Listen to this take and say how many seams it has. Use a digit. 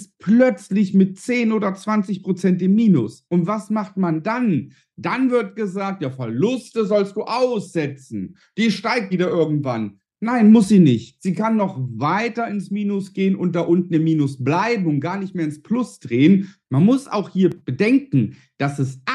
2